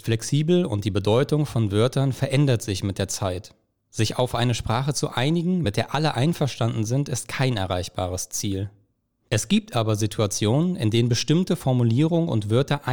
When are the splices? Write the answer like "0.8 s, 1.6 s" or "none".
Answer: none